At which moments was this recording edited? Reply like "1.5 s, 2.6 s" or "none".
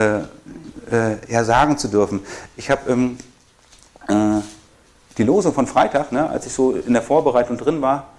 none